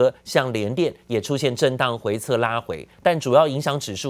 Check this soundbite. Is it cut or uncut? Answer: cut